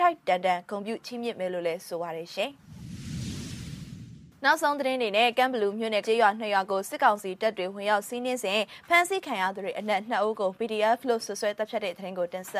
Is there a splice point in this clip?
yes; 1 cut; at 6.0 s

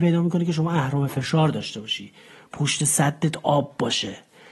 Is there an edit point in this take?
no; 0 cuts

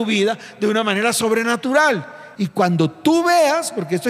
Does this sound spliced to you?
yes; 1 cut; at 2.3 s

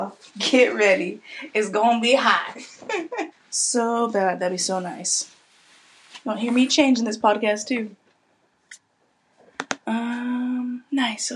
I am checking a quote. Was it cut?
yes; 1 cut; at 3.3 s

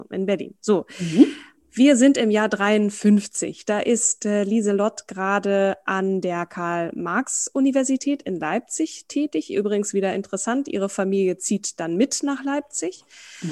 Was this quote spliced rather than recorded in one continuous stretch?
no; 0 cuts

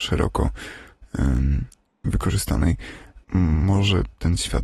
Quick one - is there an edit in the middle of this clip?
yes; 1 cut; at 3.2 s

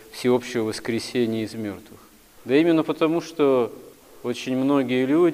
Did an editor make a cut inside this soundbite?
no; 0 cuts

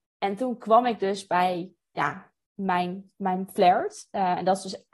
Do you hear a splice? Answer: no; 0 cuts

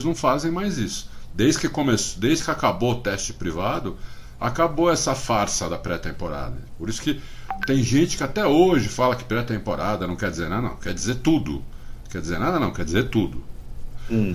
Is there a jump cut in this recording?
no; 0 cuts

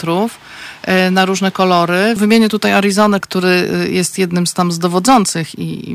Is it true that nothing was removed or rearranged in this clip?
no; 2 cuts; at 2.2 s, 3.2 s

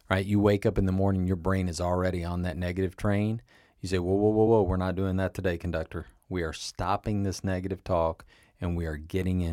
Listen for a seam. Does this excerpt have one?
yes; 1 cut; at 4.5 s

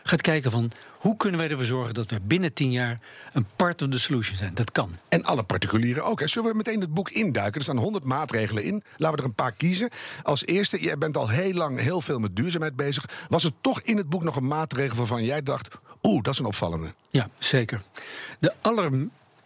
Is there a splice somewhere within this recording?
no; 0 cuts

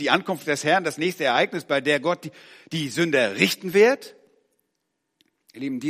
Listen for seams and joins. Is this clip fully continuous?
yes; 0 cuts

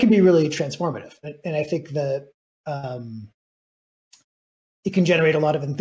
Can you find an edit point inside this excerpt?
no; 0 cuts

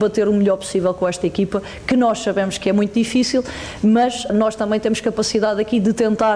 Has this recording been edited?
no; 0 cuts

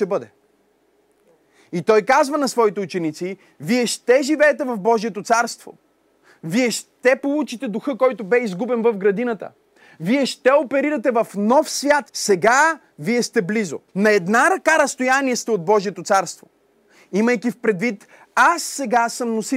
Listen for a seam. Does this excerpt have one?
yes; 2 cuts; at 12.1 s, 13.9 s

